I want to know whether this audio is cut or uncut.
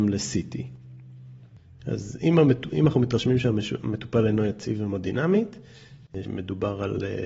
cut